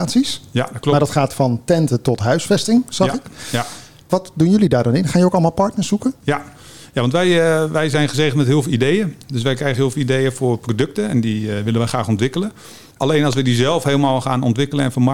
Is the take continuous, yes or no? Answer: yes